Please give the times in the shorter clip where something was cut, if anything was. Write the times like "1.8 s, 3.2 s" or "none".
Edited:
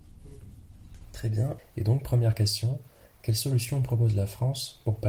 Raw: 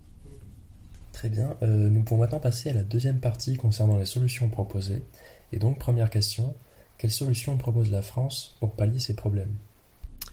1.6 s